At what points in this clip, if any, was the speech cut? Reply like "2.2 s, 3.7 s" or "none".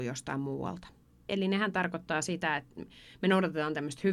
1.3 s